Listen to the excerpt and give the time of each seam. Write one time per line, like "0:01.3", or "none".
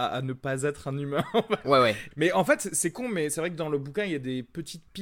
0:02.1